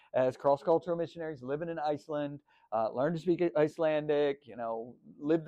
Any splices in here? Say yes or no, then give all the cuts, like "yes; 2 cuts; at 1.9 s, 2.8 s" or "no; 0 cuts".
no; 0 cuts